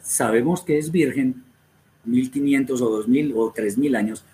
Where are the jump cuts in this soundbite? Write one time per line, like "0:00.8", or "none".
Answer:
0:02.0